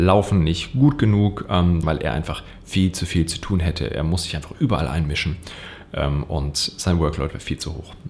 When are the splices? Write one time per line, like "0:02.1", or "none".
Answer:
0:01.8

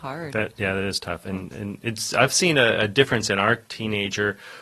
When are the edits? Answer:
none

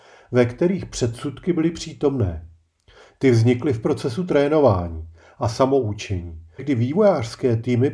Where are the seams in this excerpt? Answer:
0:03.1
0:06.6

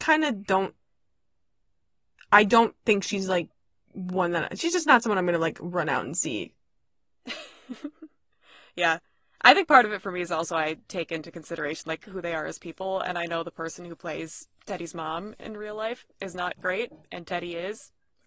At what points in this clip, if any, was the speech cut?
none

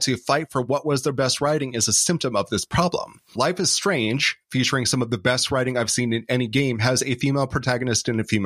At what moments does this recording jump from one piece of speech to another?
0:03.4

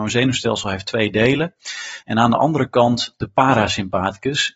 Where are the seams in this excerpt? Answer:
0:02.0

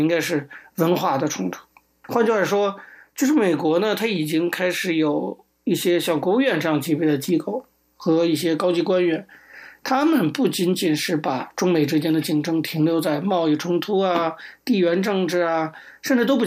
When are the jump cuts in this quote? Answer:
none

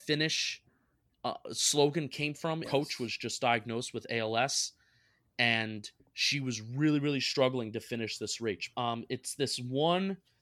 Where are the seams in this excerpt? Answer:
0:02.6
0:08.7

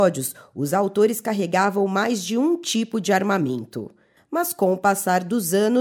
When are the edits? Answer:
0:04.2

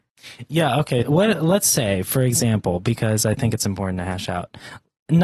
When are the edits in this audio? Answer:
0:01.0

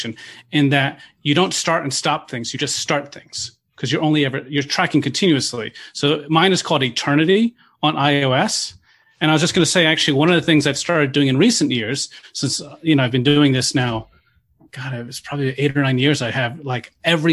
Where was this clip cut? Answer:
none

